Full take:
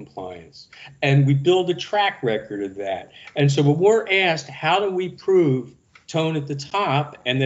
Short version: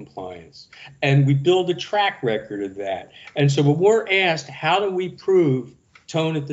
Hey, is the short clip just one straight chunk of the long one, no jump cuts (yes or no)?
yes